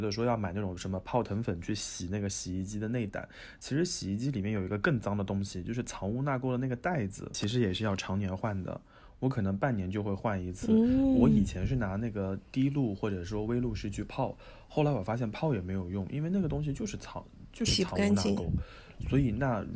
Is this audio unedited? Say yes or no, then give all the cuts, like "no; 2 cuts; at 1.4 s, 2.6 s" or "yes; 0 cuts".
yes; 0 cuts